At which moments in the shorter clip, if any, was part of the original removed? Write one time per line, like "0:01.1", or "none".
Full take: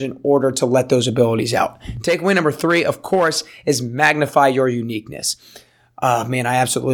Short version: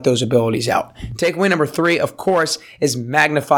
none